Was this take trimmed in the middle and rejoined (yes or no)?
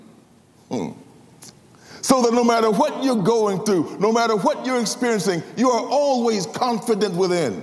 no